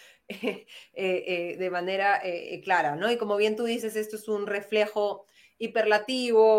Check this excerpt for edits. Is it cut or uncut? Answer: uncut